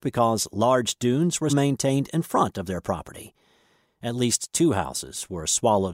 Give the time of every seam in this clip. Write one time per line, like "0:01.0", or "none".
0:01.5
0:03.8